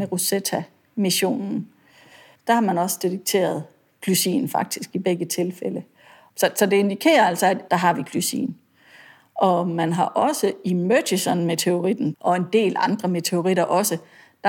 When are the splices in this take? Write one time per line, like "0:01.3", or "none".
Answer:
0:07.7
0:12.1